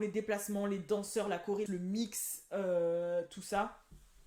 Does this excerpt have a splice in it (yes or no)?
yes